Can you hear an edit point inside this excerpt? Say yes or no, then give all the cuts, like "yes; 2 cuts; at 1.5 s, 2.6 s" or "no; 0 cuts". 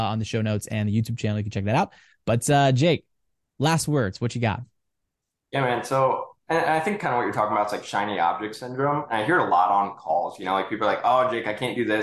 no; 0 cuts